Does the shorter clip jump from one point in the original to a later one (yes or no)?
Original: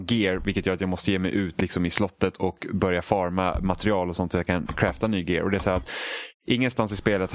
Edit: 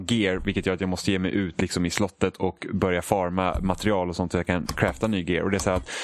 no